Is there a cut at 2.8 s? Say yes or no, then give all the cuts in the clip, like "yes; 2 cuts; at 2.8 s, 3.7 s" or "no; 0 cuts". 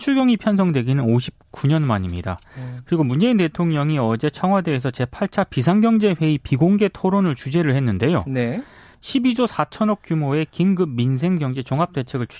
no; 1 cut; at 8.9 s